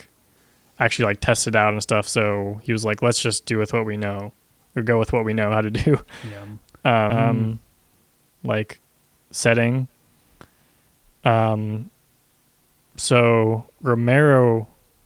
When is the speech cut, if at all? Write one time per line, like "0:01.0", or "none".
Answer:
0:07.1